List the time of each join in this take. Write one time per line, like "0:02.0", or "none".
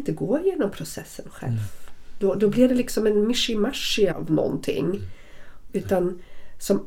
0:04.1
0:05.7